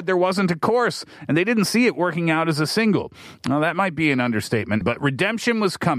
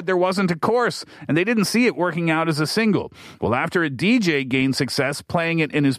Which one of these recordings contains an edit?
first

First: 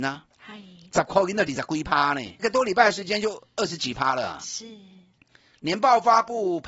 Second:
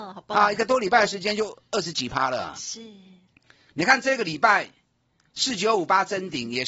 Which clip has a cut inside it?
first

